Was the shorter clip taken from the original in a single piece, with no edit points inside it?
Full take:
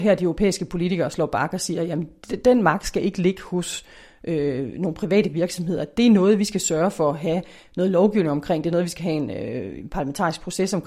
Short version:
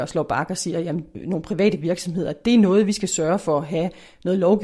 no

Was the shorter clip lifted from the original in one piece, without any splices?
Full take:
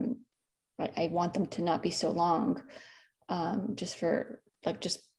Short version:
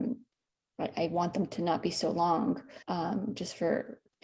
no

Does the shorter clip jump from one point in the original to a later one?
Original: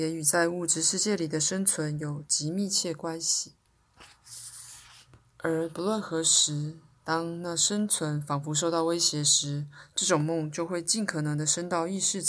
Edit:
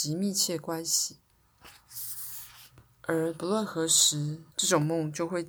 yes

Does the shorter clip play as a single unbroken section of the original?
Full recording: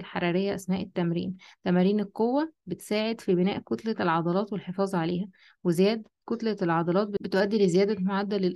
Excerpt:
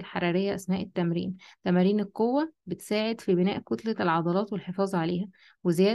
yes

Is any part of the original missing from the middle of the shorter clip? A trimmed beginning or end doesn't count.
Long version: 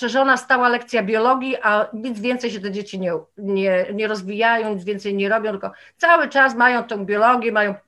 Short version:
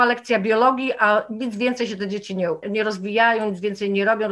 yes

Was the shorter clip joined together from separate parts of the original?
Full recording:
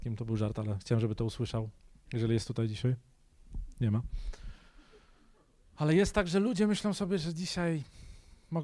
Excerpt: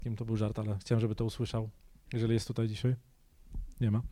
no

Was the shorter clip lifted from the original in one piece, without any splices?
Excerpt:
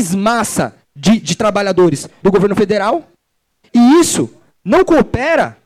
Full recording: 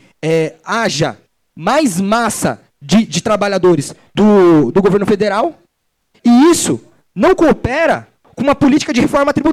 no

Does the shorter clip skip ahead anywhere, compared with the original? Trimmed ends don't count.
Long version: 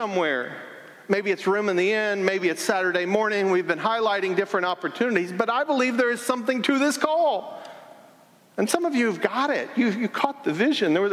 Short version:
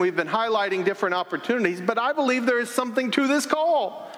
no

